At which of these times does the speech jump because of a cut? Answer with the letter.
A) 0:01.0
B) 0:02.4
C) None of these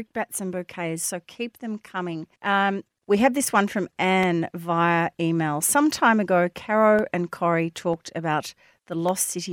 B